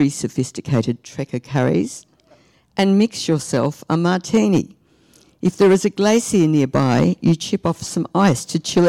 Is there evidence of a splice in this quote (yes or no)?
no